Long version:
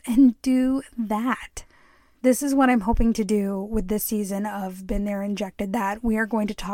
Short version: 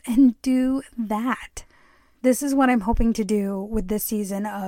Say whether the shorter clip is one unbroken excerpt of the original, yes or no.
yes